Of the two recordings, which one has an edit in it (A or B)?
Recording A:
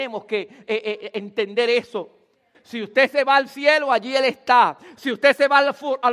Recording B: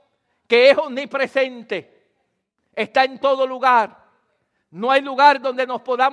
A